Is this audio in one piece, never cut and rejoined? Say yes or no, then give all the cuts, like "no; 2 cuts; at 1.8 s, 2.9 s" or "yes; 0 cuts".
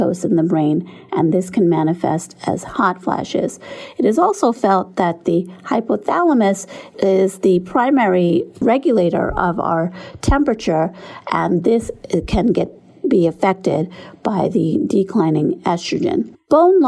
yes; 0 cuts